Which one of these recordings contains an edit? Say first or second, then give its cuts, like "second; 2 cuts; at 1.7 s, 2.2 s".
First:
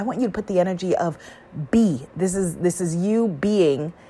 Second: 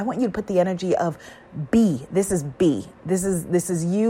first; 1 cut; at 2.1 s